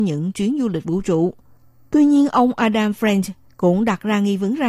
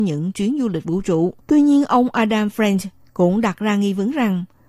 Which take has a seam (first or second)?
second